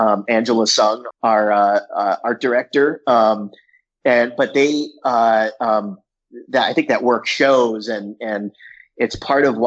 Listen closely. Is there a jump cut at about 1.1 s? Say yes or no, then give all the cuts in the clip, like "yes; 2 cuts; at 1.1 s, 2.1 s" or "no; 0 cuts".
yes; 1 cut; at 1.1 s